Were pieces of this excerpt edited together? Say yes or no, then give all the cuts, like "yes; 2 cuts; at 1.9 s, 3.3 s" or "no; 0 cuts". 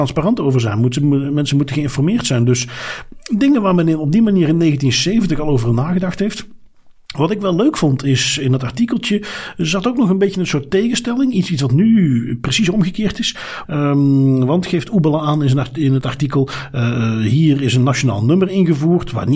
yes; 1 cut; at 13.6 s